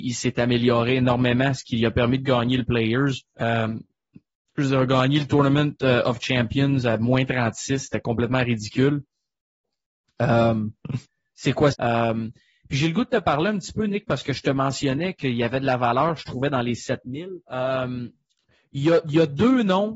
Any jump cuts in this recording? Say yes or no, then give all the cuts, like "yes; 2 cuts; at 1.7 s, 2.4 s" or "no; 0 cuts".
yes; 3 cuts; at 3.3 s, 11.7 s, 17.4 s